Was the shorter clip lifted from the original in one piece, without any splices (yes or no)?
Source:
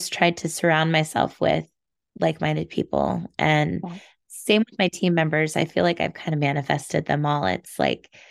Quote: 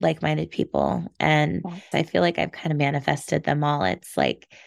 no